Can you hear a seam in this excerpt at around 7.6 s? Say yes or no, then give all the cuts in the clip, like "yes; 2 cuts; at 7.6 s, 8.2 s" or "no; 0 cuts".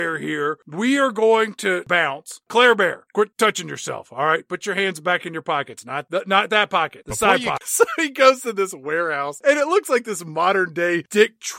yes; 1 cut; at 7.6 s